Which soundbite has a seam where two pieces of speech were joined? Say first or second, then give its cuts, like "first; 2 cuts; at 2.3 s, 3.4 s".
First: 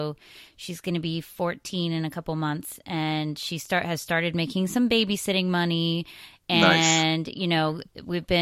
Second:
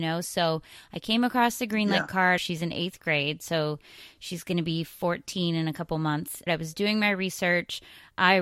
second; 2 cuts; at 2.4 s, 6.5 s